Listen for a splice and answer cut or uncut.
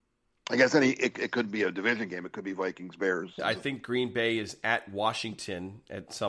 cut